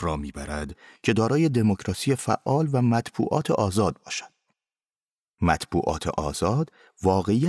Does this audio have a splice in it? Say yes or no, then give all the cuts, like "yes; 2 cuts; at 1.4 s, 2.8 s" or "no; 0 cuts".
no; 0 cuts